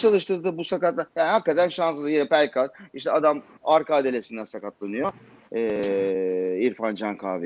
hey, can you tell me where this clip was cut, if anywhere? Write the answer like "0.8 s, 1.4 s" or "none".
1.1 s